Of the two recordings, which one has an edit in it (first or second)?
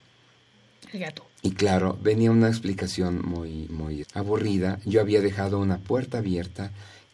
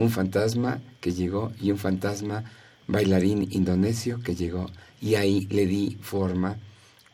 first